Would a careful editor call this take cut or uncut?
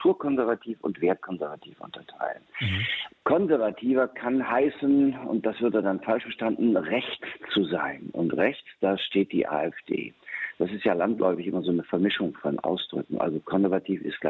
cut